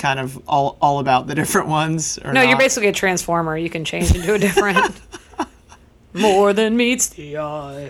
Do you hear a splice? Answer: no; 0 cuts

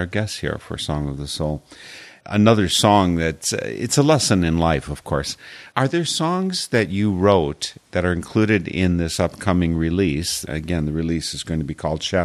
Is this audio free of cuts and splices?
yes; 0 cuts

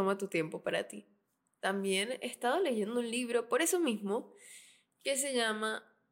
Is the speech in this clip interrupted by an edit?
no; 0 cuts

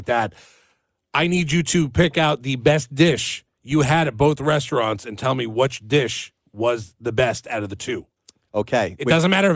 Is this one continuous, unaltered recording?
no; 1 cut; at 3.5 s

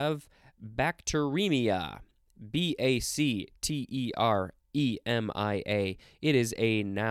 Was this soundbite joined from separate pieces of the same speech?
no; 0 cuts

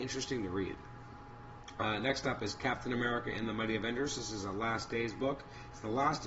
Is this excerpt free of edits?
yes; 0 cuts

